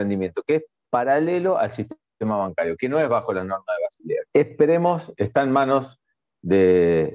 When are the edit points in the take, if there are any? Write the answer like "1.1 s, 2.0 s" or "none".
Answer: 4.3 s